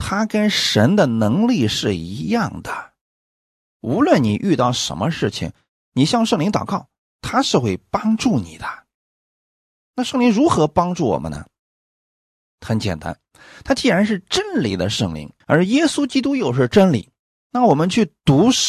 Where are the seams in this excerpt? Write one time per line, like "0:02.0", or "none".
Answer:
0:15.4